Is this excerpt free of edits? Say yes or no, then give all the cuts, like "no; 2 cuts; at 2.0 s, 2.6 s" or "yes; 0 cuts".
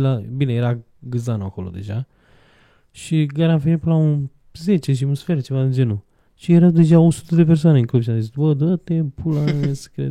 yes; 0 cuts